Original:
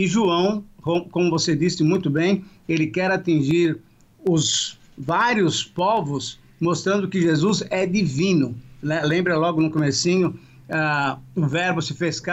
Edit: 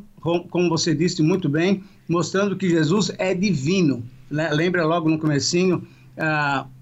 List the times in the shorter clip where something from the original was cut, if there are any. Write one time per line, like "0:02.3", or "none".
0:02.0